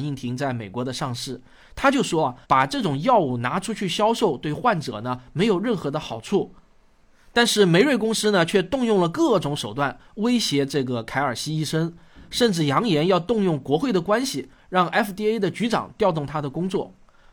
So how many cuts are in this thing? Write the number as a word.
one